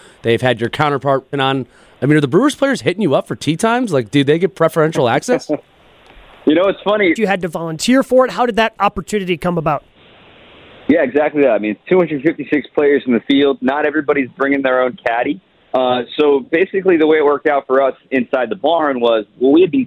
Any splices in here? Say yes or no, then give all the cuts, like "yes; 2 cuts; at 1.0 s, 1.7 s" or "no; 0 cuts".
yes; 2 cuts; at 1.3 s, 7.2 s